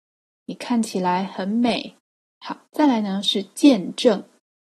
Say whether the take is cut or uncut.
cut